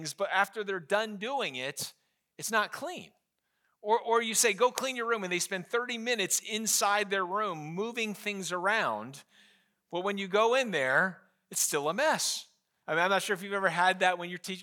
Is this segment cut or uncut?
cut